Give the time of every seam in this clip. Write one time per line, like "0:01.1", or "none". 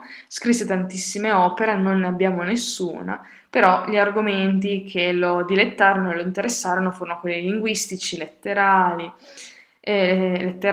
none